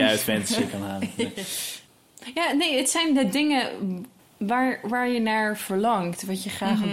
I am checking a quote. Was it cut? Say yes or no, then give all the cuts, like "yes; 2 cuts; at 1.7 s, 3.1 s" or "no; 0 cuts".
no; 0 cuts